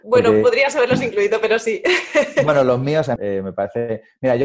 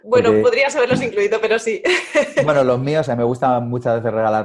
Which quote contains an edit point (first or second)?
first